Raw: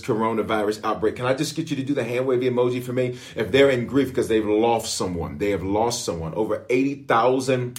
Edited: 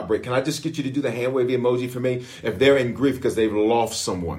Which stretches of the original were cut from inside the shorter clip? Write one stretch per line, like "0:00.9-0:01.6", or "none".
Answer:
none